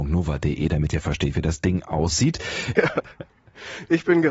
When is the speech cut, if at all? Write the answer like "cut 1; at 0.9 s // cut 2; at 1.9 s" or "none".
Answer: cut 1; at 2.8 s